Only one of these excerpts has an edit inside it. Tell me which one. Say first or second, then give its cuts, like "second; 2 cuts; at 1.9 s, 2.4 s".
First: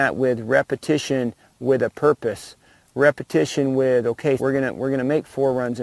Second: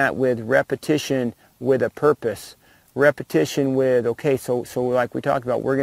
first; 1 cut; at 4.4 s